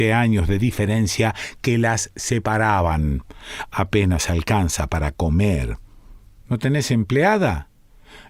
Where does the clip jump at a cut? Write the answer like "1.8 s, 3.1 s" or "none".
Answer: 6.4 s